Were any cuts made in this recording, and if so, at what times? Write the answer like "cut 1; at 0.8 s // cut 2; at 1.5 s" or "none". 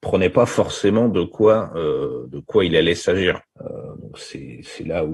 cut 1; at 3.5 s